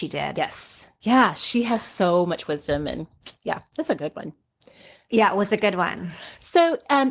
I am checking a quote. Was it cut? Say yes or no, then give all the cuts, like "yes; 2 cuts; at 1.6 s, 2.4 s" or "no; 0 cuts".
no; 0 cuts